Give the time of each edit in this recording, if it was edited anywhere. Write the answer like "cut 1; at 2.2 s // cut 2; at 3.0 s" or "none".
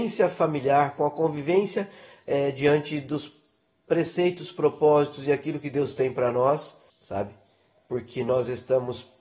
cut 1; at 6.9 s